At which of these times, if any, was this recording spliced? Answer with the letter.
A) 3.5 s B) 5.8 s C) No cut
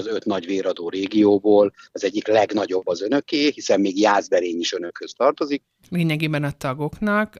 B